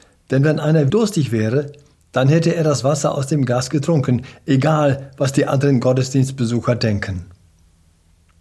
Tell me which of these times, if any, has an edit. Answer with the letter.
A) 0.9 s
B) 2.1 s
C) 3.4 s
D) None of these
A